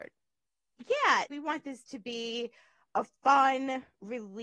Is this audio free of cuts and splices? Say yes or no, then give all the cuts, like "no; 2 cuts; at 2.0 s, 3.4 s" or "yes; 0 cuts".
no; 1 cut; at 1.3 s